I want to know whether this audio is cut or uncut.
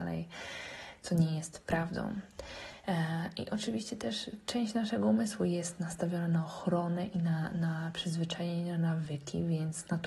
uncut